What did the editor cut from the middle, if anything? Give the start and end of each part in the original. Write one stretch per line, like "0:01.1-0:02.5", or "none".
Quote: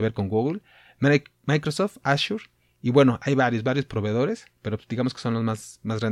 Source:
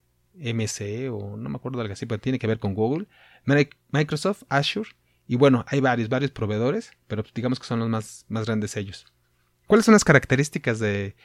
none